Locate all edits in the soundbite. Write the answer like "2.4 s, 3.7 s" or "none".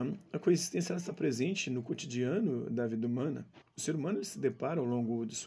3.6 s